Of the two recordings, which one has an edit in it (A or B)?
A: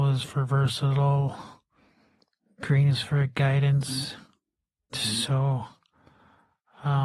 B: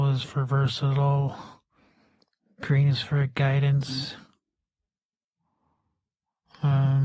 A